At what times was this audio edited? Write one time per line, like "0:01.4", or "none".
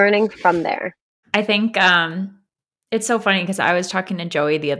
0:01.2